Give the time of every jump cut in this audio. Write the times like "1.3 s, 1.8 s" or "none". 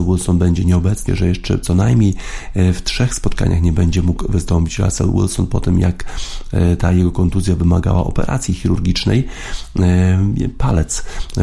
1.1 s